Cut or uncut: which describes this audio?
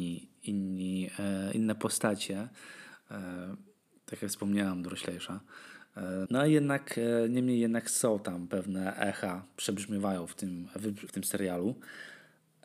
cut